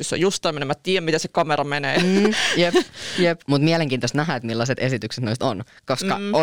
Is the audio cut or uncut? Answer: cut